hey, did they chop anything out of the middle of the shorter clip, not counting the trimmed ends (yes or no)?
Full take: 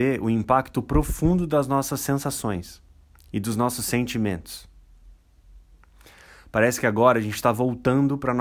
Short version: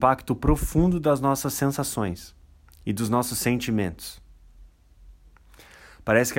no